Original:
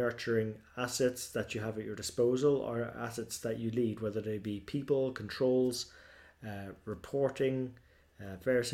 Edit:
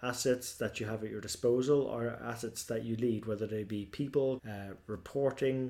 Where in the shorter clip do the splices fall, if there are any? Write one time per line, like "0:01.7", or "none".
0:04.4